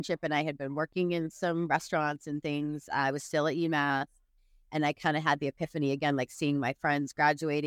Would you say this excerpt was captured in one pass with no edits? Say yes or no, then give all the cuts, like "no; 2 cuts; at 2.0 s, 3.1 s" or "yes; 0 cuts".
yes; 0 cuts